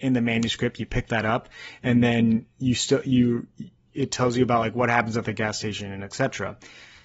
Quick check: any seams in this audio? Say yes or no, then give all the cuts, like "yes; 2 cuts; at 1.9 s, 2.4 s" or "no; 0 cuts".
no; 0 cuts